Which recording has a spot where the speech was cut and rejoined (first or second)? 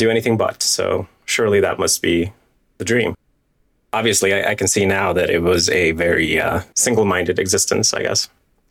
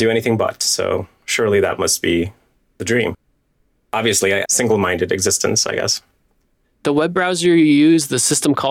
second